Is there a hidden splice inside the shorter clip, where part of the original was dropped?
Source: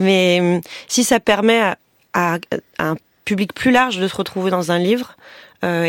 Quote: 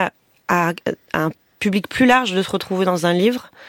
no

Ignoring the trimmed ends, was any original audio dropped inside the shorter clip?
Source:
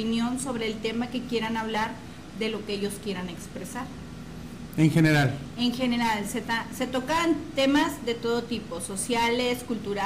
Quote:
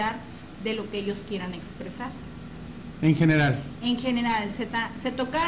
no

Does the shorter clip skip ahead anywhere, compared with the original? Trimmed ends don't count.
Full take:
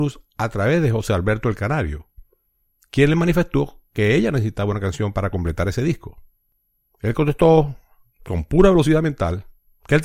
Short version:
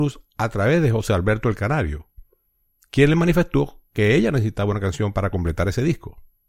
no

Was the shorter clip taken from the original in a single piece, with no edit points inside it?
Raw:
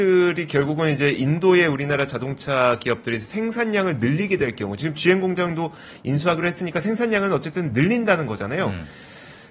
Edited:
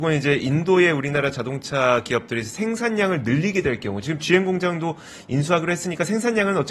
yes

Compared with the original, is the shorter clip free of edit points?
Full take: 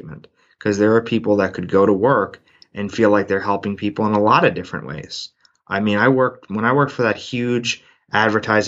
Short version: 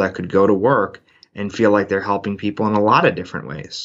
yes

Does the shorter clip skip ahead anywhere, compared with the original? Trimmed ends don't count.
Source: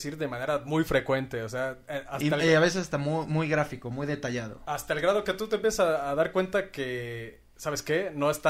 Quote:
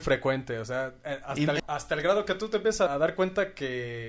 yes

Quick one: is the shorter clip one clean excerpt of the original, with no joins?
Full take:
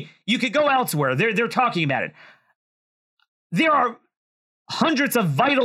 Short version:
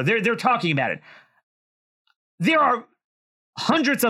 yes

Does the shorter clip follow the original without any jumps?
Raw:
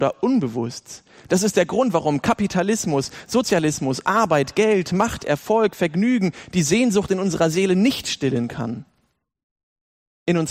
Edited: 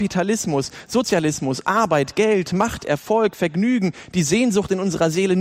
yes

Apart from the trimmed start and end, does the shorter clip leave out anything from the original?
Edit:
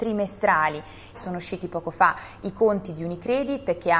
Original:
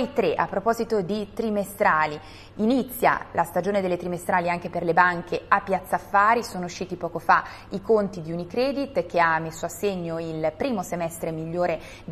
yes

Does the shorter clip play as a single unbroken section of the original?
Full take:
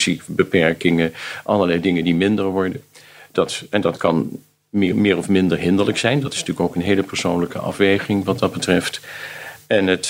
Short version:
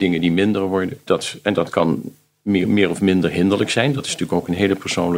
no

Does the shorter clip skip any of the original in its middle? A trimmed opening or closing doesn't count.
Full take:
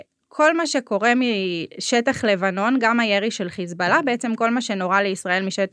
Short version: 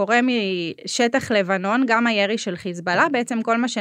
no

